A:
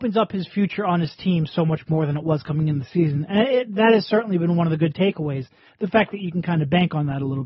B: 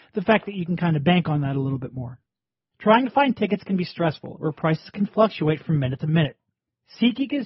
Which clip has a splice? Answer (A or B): B